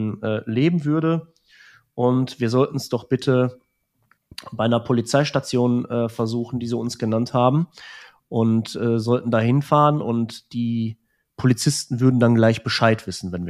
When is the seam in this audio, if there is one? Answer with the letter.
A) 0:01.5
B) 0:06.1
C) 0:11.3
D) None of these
D